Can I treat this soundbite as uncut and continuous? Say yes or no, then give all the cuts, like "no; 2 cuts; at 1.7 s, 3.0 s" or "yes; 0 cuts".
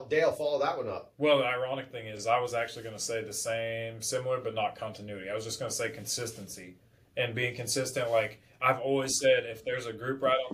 yes; 0 cuts